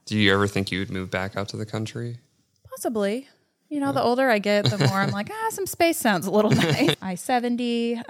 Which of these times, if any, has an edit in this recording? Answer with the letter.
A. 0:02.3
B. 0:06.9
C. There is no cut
B